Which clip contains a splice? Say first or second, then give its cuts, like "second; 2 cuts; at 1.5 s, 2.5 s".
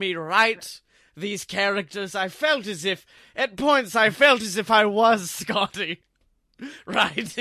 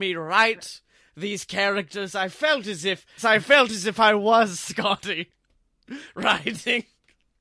second; 1 cut; at 3.2 s